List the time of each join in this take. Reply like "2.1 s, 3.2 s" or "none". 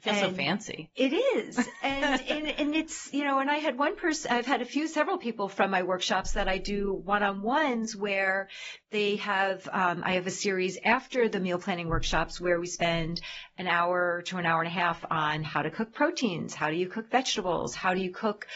none